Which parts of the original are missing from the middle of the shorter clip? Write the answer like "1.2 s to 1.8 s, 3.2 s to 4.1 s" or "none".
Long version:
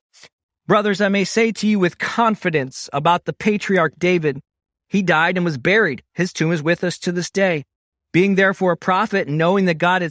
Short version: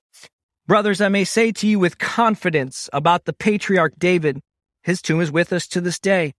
4.8 s to 6.1 s